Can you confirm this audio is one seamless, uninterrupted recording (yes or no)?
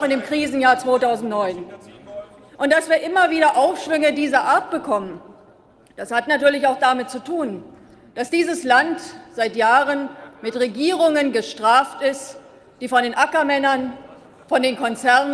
yes